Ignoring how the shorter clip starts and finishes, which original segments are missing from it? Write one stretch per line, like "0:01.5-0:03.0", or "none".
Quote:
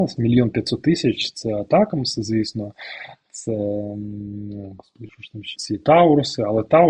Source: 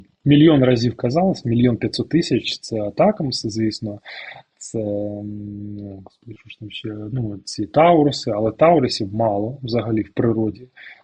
0:06.8-0:07.4